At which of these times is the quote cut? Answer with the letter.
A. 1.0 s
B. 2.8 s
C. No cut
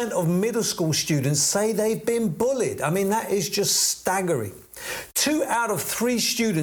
C